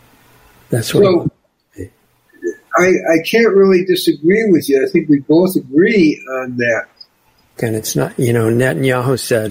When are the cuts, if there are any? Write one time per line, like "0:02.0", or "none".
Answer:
0:07.6